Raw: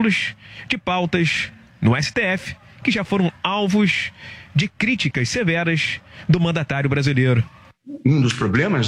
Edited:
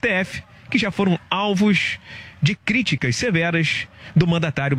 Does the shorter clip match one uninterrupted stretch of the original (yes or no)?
yes